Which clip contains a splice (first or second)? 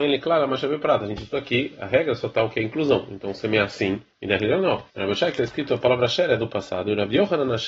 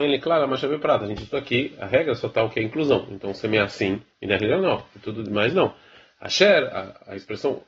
first